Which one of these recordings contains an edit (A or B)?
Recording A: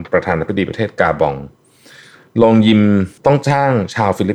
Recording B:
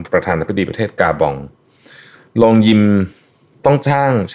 A